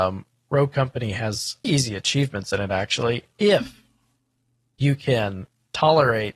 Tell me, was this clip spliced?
yes; 1 cut; at 1.6 s

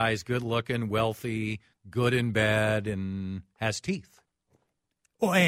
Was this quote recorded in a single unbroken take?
yes; 0 cuts

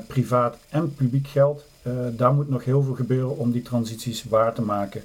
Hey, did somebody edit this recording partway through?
no; 0 cuts

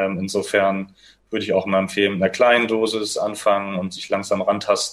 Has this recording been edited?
no; 0 cuts

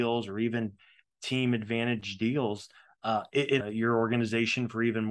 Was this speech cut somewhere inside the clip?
yes; 1 cut; at 3.6 s

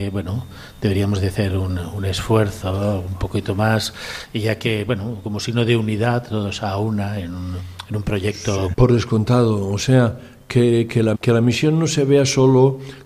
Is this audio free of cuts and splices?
no; 2 cuts; at 8.7 s, 11.1 s

